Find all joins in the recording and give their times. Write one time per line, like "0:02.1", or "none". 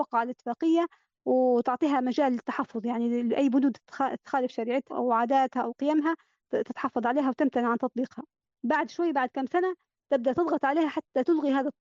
0:04.9